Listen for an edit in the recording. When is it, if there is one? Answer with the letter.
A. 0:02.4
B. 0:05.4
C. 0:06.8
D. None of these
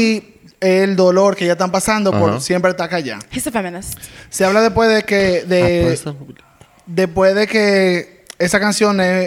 D